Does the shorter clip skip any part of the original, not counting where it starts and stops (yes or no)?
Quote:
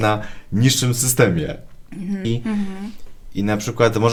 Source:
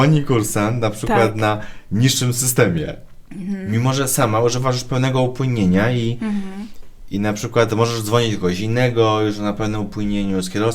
yes